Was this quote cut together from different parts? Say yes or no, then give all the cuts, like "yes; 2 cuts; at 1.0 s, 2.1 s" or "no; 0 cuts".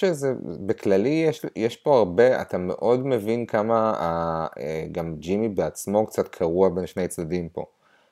no; 0 cuts